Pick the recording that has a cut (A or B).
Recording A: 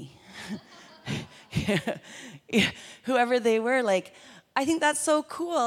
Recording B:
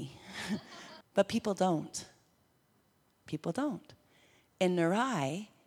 B